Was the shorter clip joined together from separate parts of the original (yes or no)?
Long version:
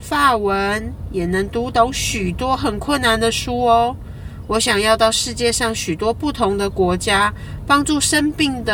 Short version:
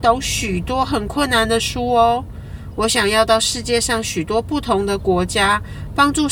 no